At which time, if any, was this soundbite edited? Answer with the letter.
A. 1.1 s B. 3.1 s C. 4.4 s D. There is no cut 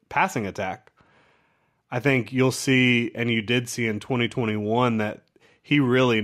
D